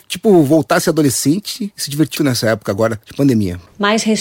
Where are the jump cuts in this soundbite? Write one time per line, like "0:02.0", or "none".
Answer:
0:02.2